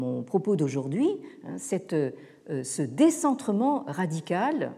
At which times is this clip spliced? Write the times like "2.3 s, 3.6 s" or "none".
none

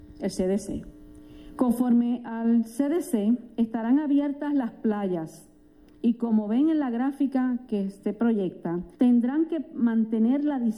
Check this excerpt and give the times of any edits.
1.6 s, 8.9 s

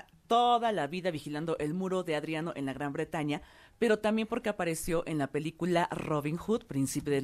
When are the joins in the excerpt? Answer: none

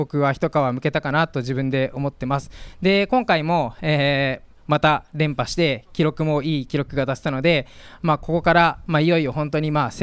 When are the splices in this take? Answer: none

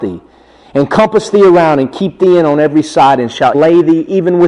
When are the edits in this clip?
3.5 s

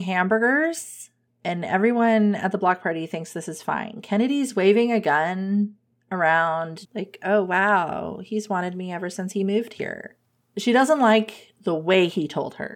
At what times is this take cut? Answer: 6.8 s

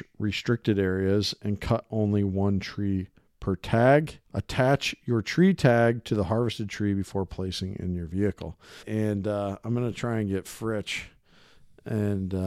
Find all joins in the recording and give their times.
4.3 s, 8.8 s

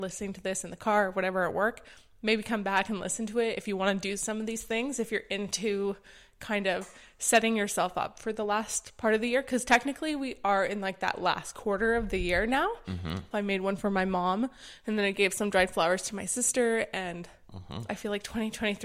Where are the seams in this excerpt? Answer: 13.3 s, 17.9 s

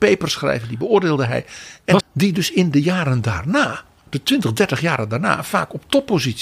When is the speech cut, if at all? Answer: 2.0 s

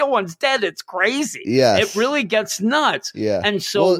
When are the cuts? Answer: none

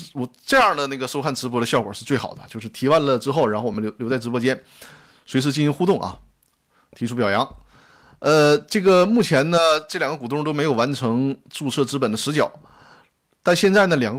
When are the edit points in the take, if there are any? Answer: none

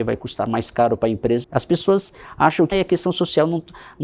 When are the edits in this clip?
1.4 s, 2.7 s

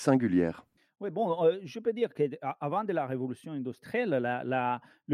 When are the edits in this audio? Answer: none

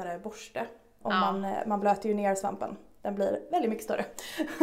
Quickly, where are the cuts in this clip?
1.0 s

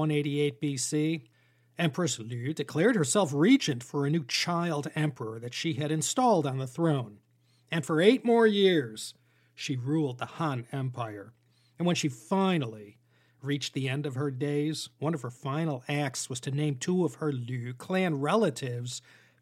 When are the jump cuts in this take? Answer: none

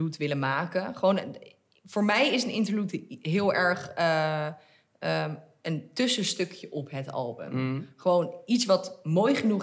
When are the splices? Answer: none

